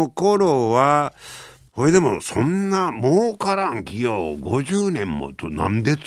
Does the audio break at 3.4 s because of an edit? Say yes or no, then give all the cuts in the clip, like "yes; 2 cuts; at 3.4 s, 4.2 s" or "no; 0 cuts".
no; 1 cut; at 1.7 s